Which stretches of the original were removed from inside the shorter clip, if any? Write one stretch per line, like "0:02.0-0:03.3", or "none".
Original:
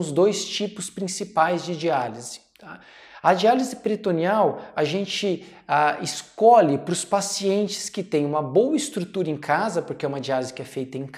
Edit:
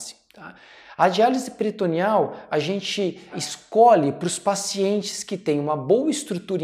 0:05.6-0:06.0

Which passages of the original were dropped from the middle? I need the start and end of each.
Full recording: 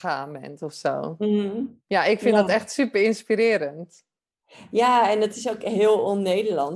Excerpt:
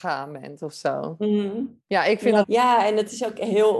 0:02.4-0:04.7

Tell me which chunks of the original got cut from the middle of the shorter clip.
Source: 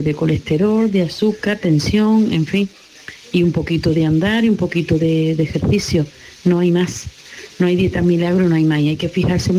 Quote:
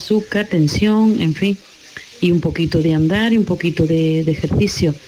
none

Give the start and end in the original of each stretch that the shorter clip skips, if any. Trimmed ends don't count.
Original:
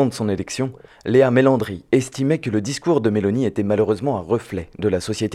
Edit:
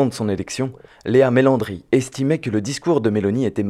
none

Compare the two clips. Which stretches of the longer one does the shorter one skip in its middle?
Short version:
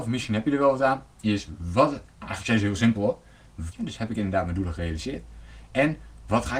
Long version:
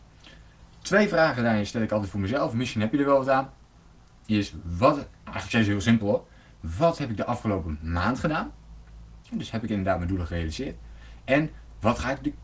0:03.6-0:04.2
0:06.7-0:09.2

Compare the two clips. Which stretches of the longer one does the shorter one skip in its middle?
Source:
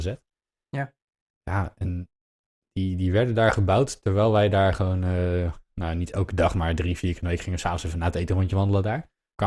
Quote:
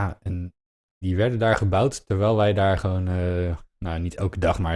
0:02.6-0:03.0

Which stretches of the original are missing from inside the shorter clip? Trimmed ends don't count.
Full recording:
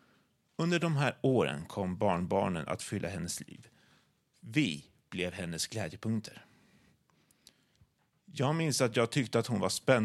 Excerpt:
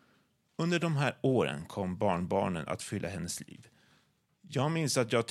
0:04.2-0:08.1

